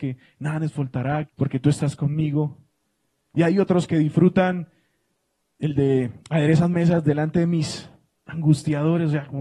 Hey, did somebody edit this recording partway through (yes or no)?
yes